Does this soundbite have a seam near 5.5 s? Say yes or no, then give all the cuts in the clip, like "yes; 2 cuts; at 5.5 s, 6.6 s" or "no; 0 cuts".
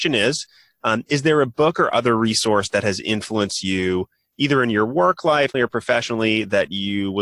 yes; 1 cut; at 5.5 s